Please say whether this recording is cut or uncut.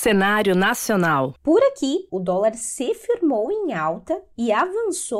cut